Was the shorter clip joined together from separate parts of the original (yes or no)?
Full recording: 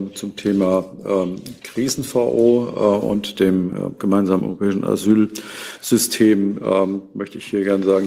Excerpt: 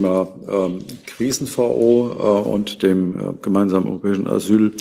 no